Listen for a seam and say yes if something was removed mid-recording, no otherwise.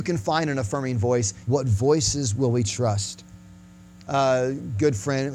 yes